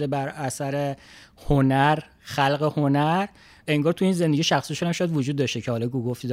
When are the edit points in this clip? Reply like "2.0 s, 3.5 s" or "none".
none